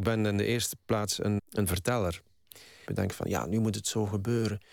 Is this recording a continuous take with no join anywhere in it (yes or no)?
no